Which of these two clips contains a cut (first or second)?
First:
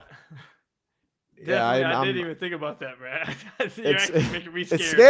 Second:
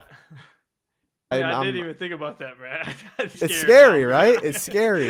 second